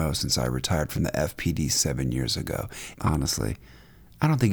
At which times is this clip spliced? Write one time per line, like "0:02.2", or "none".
0:02.9